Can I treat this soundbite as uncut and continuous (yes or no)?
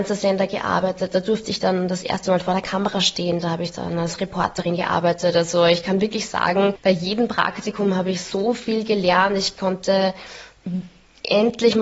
yes